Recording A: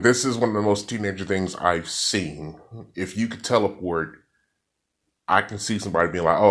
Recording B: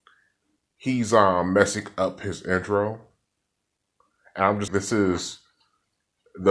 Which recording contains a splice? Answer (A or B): B